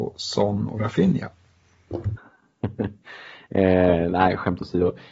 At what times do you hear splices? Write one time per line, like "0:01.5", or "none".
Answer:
0:02.2